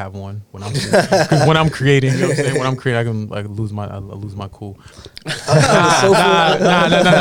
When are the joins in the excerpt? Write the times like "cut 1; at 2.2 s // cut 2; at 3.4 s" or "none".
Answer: cut 1; at 4.9 s